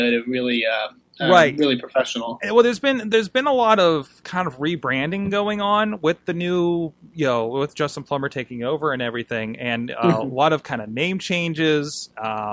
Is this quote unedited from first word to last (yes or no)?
yes